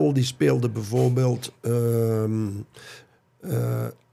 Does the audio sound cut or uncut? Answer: uncut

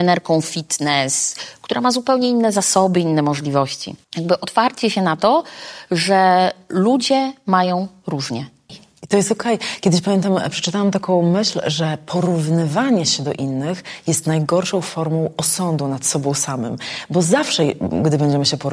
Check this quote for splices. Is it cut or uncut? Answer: cut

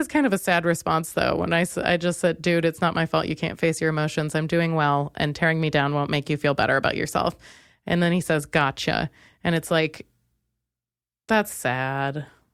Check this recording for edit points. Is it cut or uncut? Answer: uncut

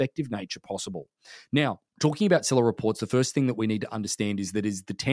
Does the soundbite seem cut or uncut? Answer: cut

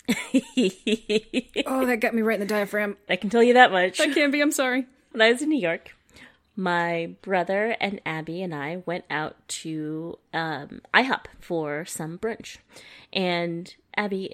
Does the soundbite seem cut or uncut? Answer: cut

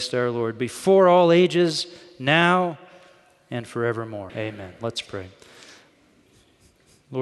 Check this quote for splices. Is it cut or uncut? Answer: cut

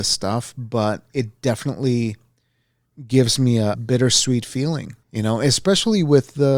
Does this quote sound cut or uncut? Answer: cut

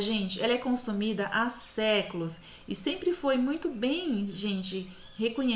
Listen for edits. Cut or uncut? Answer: uncut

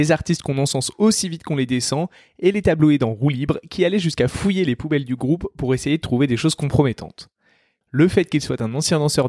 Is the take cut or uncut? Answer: cut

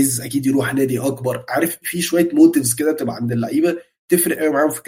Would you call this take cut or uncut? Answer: cut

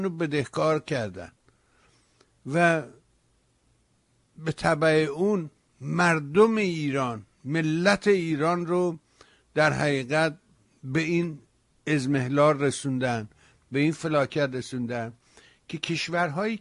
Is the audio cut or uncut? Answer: uncut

